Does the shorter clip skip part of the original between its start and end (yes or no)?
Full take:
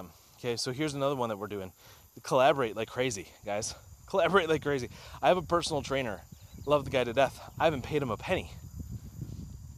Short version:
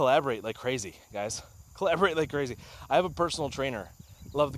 no